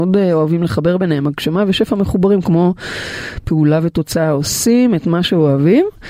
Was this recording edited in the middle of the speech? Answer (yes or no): no